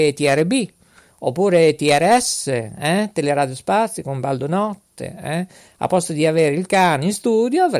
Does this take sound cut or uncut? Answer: uncut